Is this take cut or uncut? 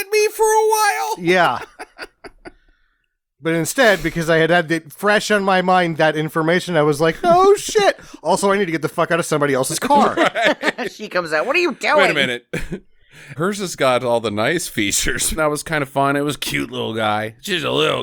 cut